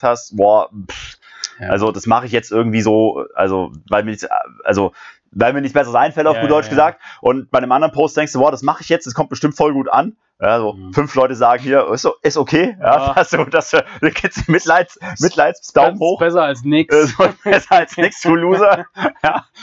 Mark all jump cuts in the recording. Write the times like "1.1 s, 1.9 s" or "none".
none